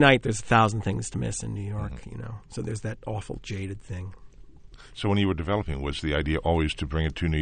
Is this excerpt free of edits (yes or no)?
yes